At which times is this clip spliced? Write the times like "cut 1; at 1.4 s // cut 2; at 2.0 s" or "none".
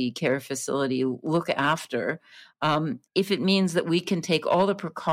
cut 1; at 3.1 s